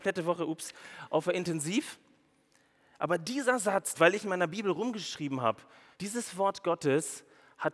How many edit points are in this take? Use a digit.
2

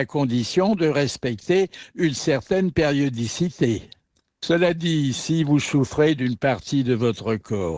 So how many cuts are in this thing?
0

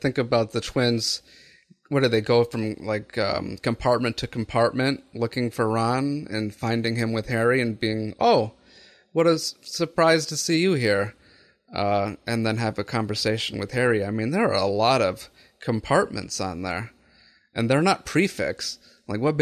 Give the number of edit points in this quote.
0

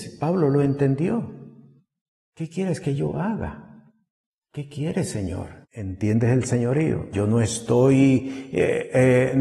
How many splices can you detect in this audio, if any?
3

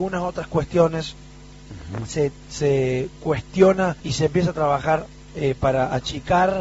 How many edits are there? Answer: 1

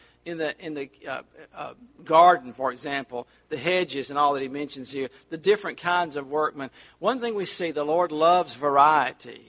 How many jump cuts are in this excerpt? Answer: 0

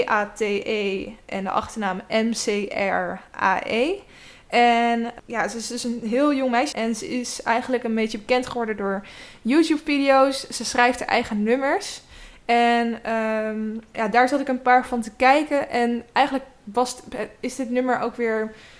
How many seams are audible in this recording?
2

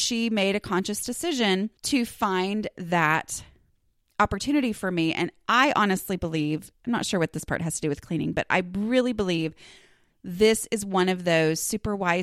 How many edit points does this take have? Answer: 1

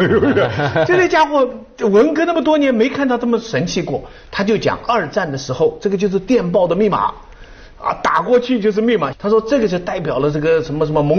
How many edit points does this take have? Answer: 1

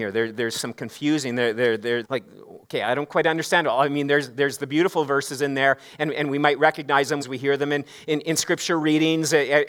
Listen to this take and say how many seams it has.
2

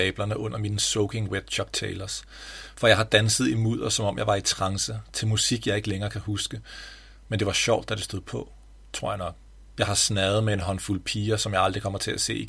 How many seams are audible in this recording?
1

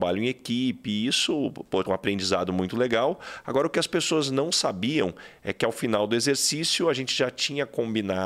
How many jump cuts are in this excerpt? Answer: 1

